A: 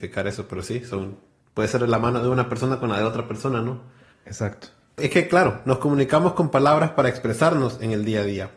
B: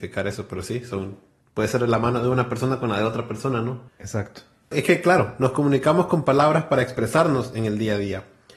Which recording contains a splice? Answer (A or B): B